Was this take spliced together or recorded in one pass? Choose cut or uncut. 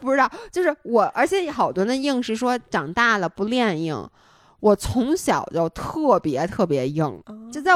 uncut